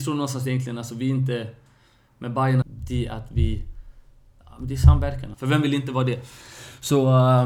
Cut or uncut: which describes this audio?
cut